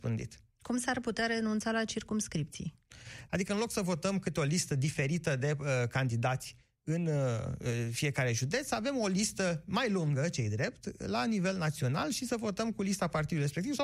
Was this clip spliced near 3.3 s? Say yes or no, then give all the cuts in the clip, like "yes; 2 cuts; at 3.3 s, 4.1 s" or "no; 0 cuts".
yes; 1 cut; at 3.3 s